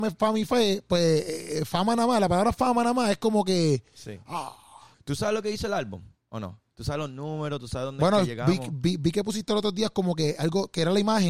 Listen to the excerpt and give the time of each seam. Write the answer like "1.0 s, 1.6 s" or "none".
4.9 s